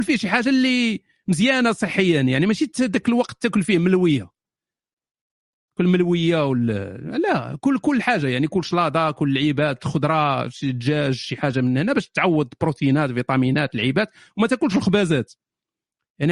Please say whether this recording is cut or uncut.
uncut